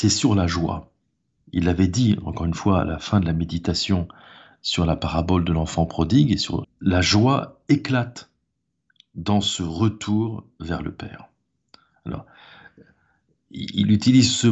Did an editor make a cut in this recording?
yes; 1 cut; at 6.6 s

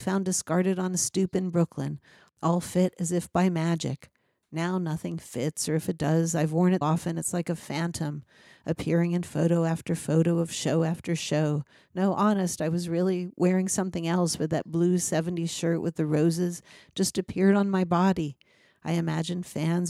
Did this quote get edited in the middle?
yes; 1 cut; at 6.8 s

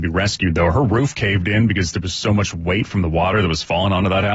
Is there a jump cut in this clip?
no; 0 cuts

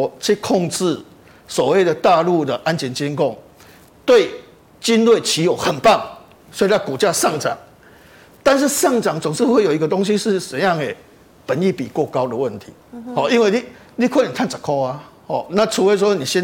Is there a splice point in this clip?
no; 0 cuts

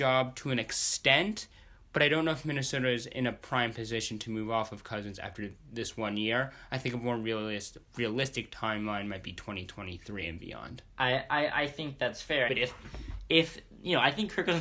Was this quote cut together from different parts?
yes; 2 cuts; at 10.9 s, 12.5 s

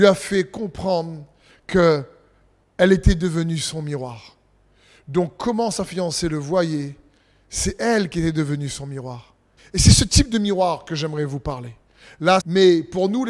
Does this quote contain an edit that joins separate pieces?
yes; 2 cuts; at 9.6 s, 12.4 s

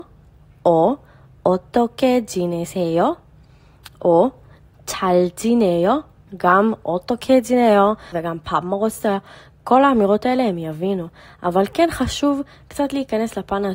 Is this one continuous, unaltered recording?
no; 2 cuts; at 6.3 s, 8.1 s

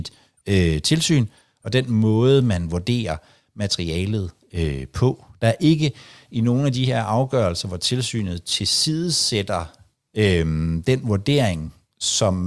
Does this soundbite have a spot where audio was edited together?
no; 0 cuts

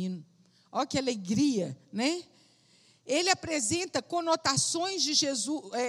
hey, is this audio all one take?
yes; 0 cuts

